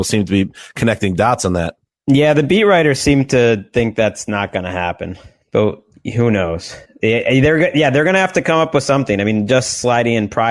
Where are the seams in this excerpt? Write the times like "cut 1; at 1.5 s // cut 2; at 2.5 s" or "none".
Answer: none